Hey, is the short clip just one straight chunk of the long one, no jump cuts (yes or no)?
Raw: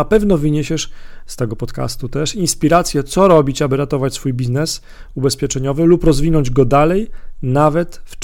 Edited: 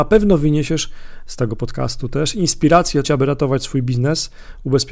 no